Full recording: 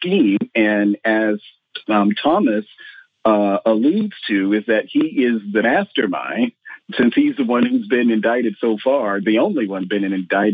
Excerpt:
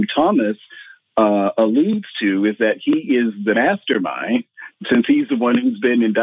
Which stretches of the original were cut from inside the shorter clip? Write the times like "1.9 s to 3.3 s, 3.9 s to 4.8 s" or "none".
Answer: none